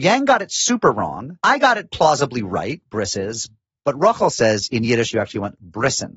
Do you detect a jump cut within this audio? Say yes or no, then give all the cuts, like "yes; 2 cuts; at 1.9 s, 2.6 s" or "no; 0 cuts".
no; 0 cuts